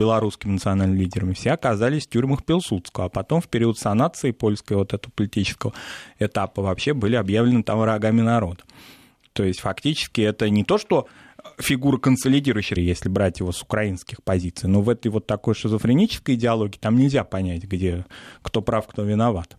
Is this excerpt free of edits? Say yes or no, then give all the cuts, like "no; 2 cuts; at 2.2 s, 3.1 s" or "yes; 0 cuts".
no; 1 cut; at 12.8 s